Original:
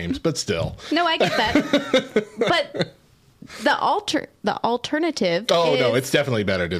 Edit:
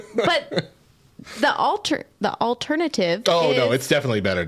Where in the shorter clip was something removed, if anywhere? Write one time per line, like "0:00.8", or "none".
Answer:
none